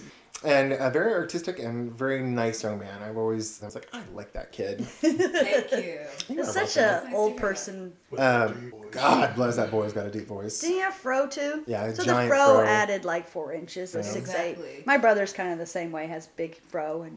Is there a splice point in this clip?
yes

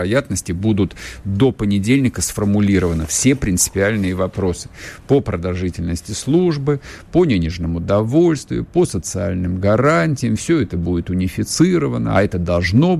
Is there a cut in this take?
no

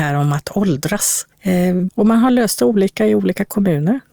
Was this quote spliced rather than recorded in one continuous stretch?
yes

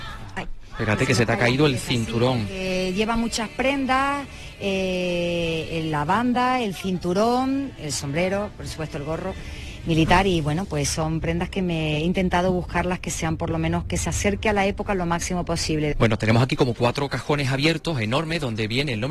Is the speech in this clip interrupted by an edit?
yes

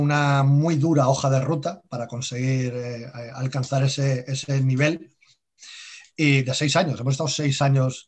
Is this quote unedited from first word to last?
yes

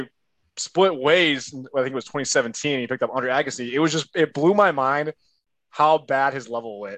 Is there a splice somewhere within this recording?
no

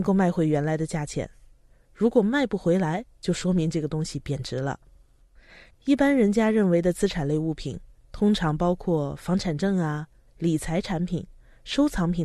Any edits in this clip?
yes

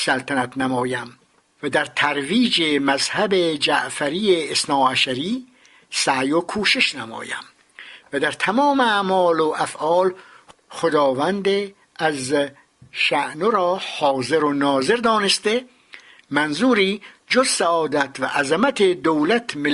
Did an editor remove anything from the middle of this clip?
no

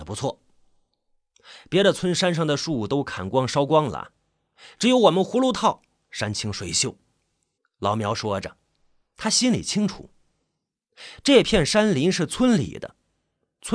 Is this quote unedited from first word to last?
no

